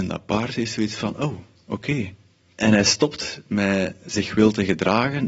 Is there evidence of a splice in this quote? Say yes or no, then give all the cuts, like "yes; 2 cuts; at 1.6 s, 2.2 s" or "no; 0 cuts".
yes; 1 cut; at 2.5 s